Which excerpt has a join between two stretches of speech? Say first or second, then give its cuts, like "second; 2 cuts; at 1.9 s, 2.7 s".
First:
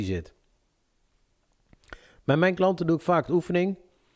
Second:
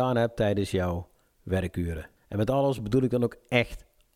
second; 1 cut; at 2.2 s